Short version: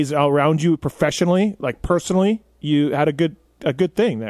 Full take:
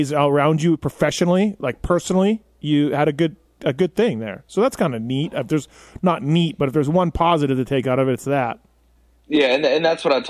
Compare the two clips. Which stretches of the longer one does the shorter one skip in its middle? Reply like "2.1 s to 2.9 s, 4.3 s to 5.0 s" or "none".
none